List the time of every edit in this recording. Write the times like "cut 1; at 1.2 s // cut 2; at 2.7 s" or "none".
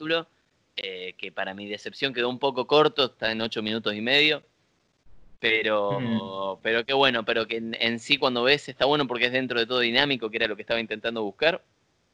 none